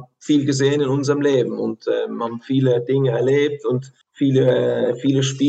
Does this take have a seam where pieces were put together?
yes; 1 cut; at 4.0 s

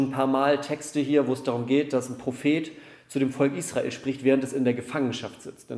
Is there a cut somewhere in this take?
no; 0 cuts

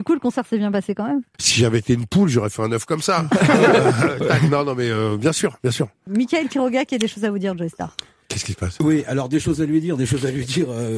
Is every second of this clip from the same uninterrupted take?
yes; 0 cuts

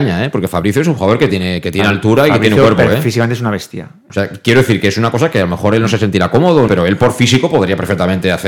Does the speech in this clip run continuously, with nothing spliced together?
no; 2 cuts; at 4.1 s, 6.7 s

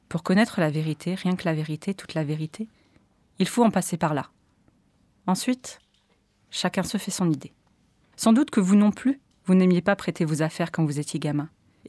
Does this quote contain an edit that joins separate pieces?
no; 0 cuts

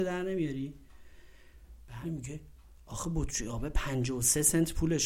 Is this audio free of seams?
no; 1 cut; at 2.0 s

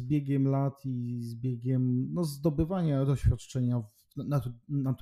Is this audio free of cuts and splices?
yes; 0 cuts

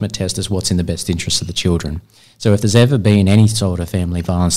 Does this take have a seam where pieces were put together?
no; 0 cuts

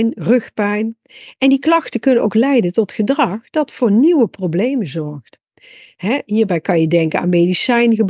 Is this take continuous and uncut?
yes; 0 cuts

